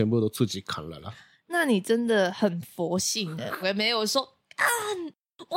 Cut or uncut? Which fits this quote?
cut